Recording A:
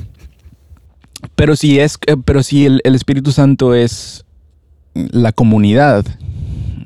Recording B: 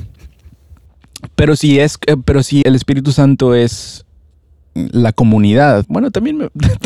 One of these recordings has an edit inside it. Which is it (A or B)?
B